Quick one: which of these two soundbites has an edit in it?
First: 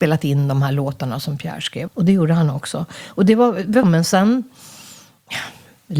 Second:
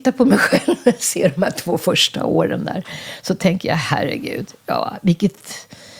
first; 2 cuts; at 1.9 s, 3.8 s

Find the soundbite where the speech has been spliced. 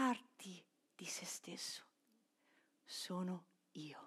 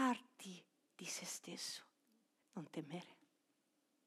second; 1 cut; at 2.4 s

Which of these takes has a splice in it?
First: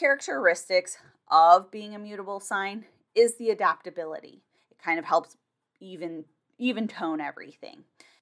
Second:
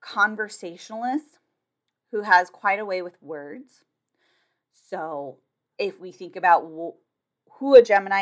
first; 1 cut; at 4.6 s

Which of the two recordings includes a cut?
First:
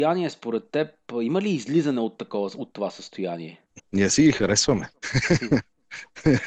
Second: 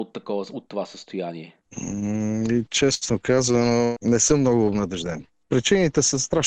first; 1 cut; at 3.8 s

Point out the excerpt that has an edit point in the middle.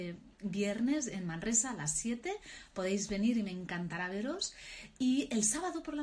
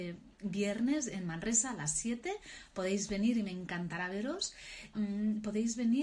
second; 1 cut; at 4.9 s

